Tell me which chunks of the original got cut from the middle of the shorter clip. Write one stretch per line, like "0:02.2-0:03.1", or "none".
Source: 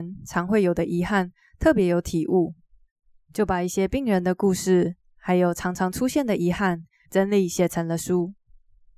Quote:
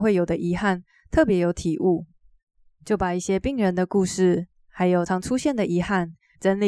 0:05.5-0:05.8

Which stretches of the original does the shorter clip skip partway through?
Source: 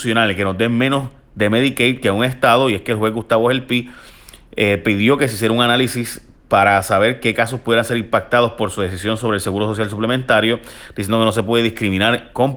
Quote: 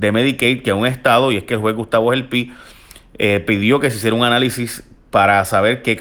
none

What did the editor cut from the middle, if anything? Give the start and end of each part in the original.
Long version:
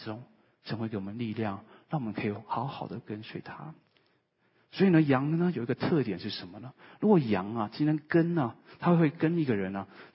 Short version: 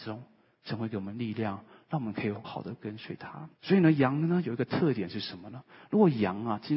0:02.4-0:02.7
0:03.8-0:04.6

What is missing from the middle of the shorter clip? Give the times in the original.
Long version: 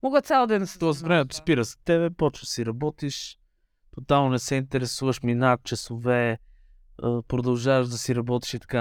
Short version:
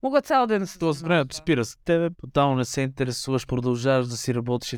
0:02.1-0:03.9
0:05.2-0:07.3

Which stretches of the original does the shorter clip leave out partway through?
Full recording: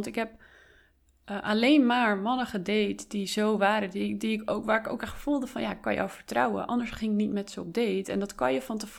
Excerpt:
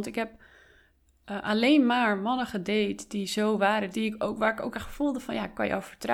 0:03.9-0:04.2

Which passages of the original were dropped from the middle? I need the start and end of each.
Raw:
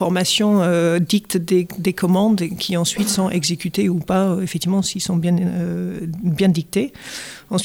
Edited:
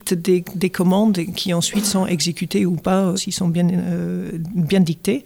0:04.4-0:04.8

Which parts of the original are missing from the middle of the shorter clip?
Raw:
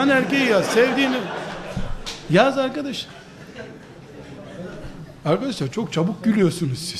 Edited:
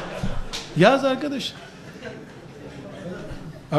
none

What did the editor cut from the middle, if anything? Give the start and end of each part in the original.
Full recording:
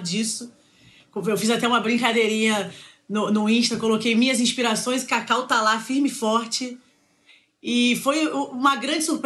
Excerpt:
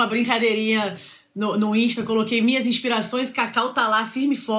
none

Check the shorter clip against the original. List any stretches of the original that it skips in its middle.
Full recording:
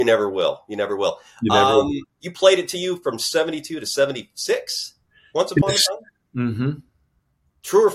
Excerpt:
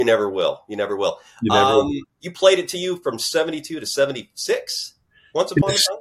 none

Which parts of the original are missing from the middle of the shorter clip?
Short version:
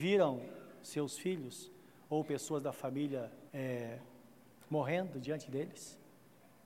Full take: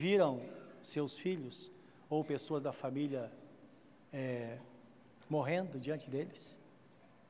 0:03.5-0:04.1

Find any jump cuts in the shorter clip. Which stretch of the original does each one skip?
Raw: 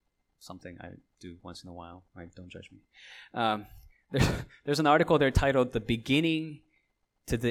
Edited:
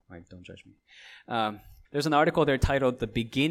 0:03.9-0:04.6

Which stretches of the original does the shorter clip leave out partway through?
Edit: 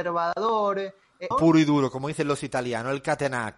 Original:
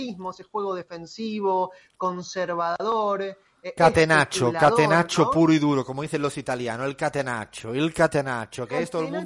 0:03.7-0:05.2

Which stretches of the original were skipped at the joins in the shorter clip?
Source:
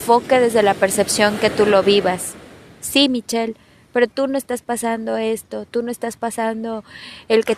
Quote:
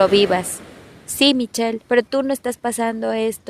0:03.6-0:03.9

